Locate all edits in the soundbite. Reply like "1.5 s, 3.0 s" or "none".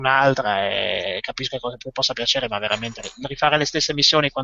none